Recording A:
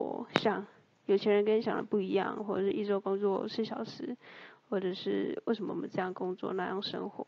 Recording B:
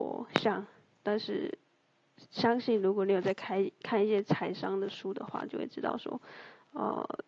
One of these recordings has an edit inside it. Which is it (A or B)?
B